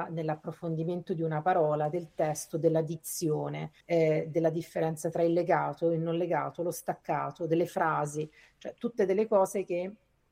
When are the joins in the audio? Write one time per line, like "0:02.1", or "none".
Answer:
0:03.8